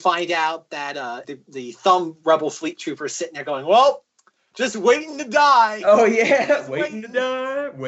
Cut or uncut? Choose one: cut